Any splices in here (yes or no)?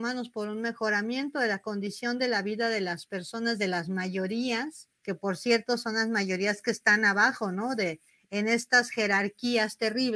no